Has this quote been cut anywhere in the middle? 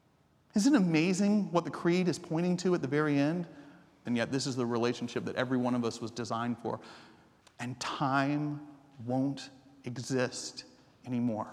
yes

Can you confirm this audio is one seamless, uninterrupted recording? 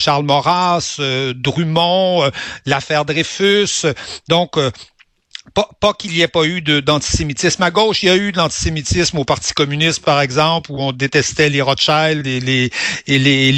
yes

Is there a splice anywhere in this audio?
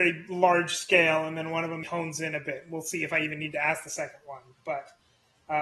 yes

